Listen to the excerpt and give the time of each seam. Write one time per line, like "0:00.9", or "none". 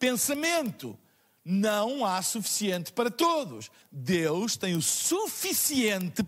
0:03.8